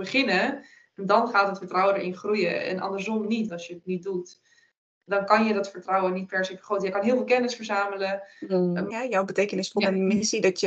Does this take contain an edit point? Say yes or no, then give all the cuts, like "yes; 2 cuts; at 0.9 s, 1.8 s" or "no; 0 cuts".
yes; 2 cuts; at 3.5 s, 8.9 s